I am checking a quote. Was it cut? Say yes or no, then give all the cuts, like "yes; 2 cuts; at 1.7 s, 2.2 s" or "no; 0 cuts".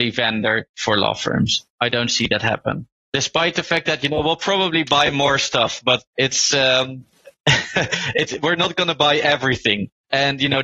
no; 0 cuts